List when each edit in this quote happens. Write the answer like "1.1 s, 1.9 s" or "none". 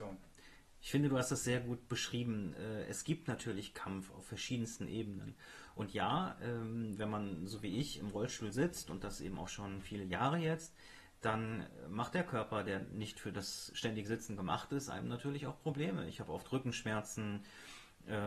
none